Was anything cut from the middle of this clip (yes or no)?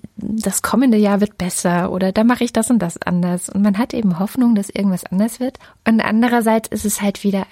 no